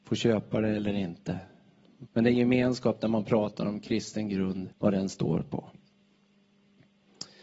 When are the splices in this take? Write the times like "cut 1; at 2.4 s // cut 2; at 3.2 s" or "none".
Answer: cut 1; at 2.1 s // cut 2; at 4.7 s

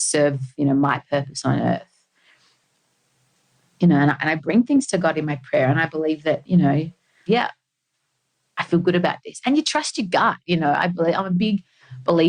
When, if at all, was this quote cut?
cut 1; at 7.3 s

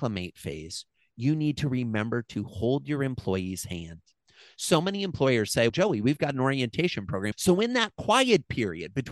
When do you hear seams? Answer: cut 1; at 5.7 s // cut 2; at 7.3 s

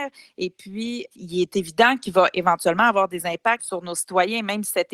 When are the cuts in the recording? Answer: cut 1; at 1.1 s // cut 2; at 3.6 s

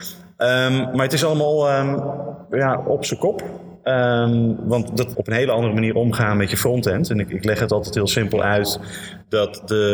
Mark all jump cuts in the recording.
cut 1; at 5.1 s

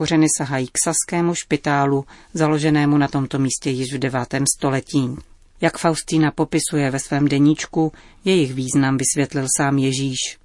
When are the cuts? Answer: cut 1; at 5.5 s

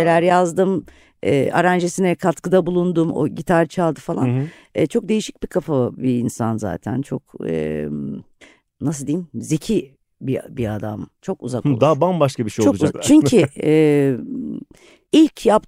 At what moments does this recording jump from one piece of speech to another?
cut 1; at 11.2 s // cut 2; at 12.9 s

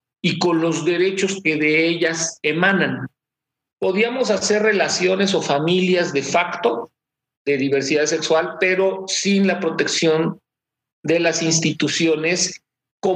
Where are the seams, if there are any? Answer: cut 1; at 3.7 s

